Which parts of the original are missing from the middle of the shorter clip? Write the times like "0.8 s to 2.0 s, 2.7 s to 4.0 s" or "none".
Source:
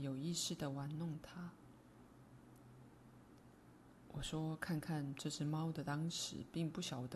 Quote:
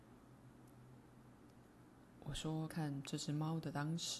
4.6 s to 4.8 s

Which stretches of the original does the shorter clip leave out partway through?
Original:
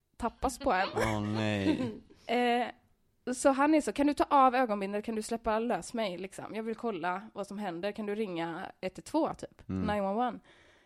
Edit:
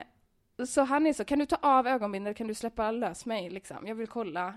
none

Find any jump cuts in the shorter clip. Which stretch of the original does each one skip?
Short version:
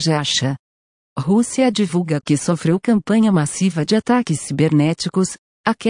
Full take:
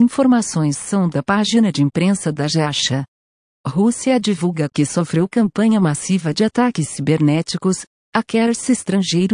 none

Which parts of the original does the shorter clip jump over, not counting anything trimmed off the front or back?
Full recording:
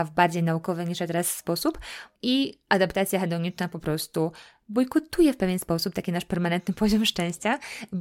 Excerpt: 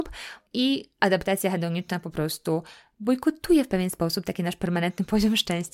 none

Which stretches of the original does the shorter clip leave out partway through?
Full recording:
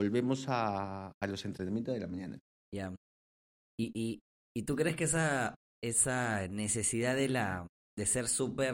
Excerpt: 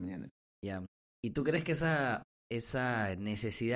3.2 s to 4.4 s

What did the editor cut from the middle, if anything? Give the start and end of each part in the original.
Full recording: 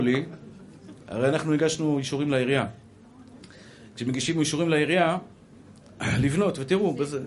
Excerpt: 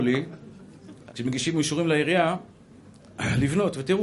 1.1 s to 3.9 s

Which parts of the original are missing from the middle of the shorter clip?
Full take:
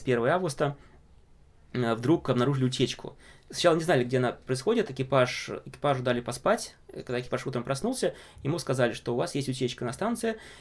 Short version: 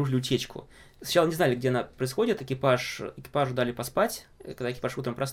none

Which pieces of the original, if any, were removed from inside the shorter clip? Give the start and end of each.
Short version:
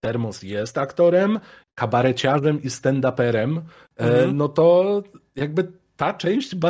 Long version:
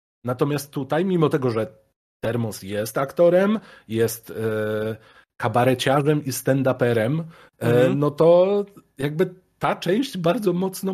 3.8 s to 5.3 s

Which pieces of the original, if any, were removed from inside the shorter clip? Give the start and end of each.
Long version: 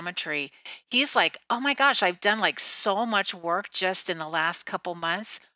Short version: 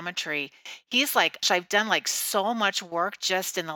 1.4 s to 1.9 s

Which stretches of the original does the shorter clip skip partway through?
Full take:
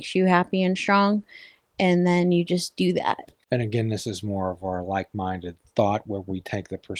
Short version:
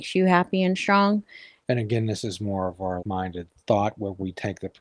1.6 s to 3.5 s, 4.8 s to 5.1 s

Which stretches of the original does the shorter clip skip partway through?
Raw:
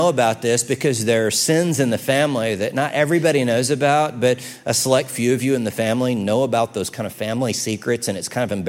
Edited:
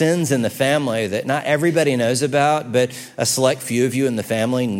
none

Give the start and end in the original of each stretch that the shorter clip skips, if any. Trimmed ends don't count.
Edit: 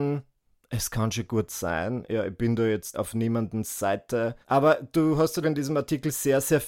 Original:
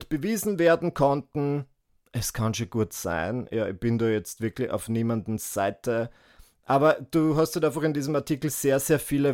4.4 s to 4.7 s, 6.2 s to 6.6 s, 7.6 s to 7.8 s

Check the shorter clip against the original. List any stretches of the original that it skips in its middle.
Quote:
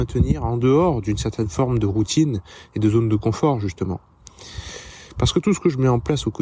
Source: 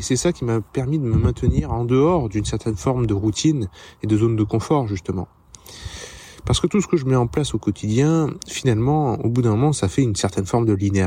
none

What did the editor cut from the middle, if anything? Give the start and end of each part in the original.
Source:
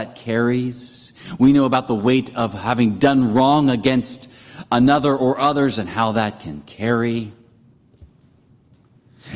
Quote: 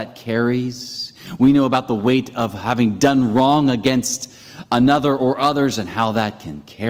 none

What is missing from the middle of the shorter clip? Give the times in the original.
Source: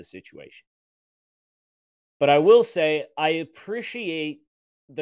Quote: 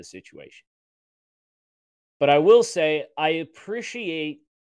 none

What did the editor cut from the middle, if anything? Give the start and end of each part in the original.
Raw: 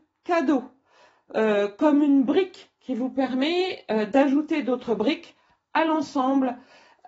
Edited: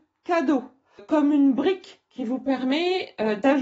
1.0 s to 1.7 s

